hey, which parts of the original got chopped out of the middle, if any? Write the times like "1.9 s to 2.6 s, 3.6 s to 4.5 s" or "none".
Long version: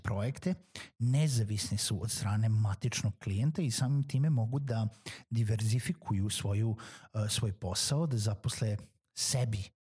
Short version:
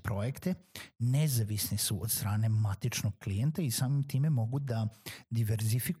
none